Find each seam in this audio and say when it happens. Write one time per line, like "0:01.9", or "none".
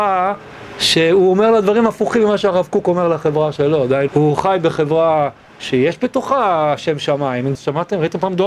0:04.1
0:07.6

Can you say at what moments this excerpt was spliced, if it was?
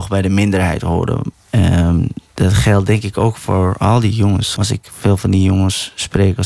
0:01.3
0:04.6

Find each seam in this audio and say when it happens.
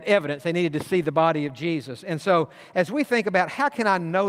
none

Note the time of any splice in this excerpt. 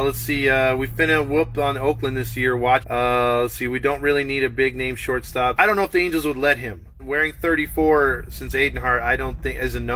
0:02.8
0:05.6
0:07.0

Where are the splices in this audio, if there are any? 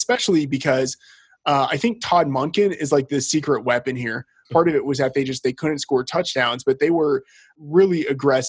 0:04.4

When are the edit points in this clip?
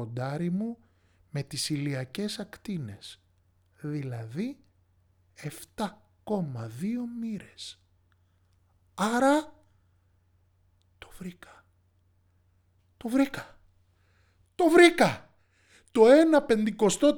none

